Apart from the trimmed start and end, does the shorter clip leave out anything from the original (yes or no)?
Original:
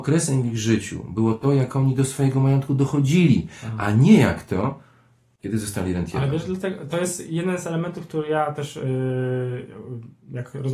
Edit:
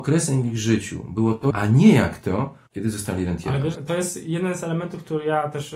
yes